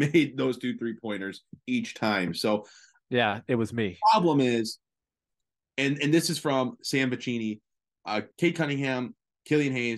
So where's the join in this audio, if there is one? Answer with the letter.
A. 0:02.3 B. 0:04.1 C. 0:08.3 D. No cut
C